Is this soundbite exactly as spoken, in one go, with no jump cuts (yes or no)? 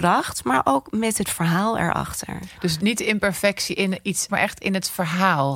no